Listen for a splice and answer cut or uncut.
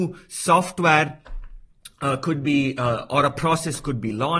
uncut